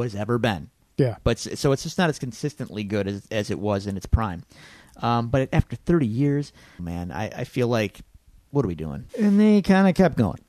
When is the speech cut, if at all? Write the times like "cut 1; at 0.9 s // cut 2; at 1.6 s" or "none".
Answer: cut 1; at 6.8 s // cut 2; at 9.1 s